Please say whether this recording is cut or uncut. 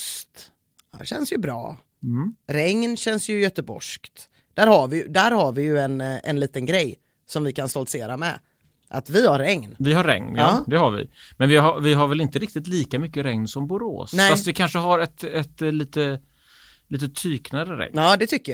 uncut